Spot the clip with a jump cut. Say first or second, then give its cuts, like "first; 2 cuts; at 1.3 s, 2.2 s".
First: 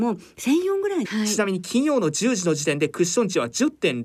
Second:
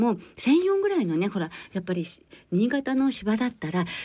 first; 1 cut; at 1.1 s